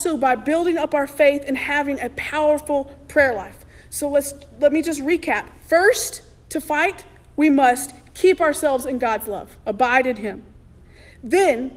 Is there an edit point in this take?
no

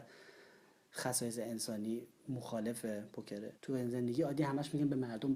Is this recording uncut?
no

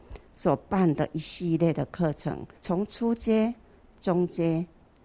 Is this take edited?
yes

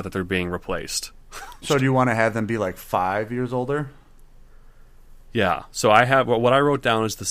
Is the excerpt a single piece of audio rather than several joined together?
no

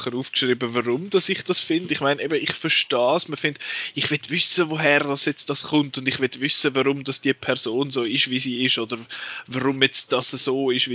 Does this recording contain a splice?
no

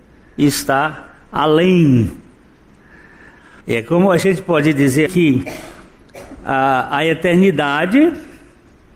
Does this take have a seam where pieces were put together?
yes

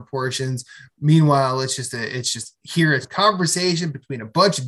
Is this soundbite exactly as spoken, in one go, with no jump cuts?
no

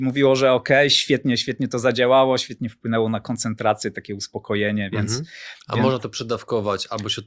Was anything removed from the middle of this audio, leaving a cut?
no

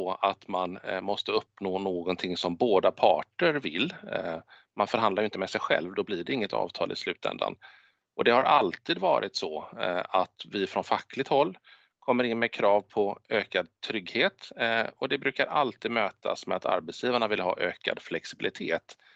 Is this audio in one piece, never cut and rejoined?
yes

